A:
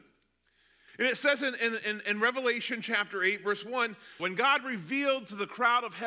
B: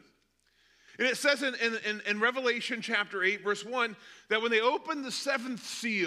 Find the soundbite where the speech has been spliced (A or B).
A